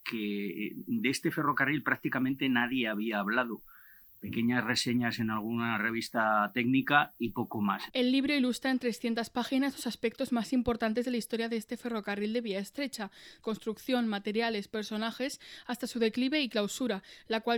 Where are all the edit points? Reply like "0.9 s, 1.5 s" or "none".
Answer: 7.9 s, 13.4 s